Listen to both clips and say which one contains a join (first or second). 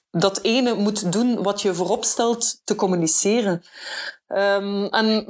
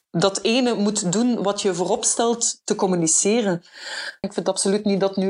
second